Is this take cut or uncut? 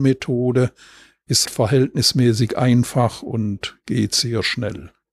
cut